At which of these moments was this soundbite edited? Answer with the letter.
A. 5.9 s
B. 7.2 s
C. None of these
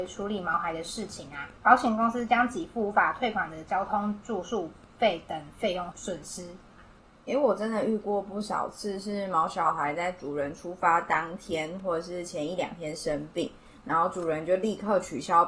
A